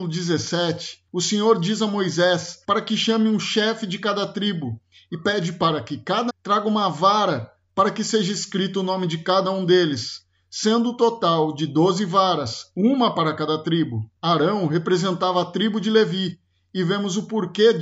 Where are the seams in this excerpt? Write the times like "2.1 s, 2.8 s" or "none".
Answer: 6.3 s